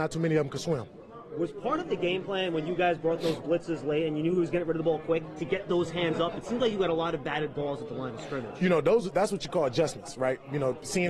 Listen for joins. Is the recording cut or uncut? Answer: uncut